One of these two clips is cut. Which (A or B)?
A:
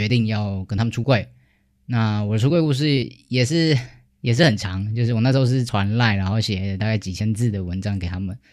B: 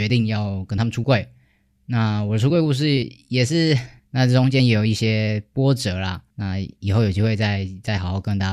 B